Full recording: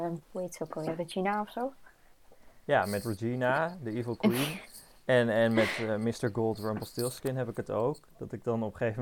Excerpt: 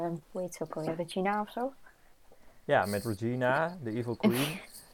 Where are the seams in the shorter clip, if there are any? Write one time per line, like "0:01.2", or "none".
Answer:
none